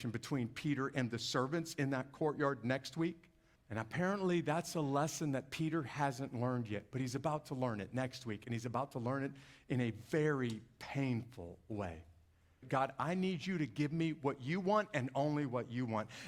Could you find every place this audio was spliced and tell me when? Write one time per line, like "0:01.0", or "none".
0:03.6
0:12.6